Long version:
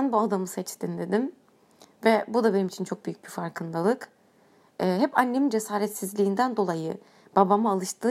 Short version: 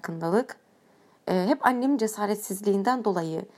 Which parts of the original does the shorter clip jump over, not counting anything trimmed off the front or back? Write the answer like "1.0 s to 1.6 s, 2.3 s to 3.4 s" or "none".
none